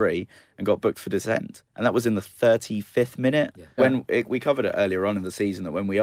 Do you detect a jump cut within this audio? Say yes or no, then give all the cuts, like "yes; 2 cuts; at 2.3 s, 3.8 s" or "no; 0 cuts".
yes; 1 cut; at 3.8 s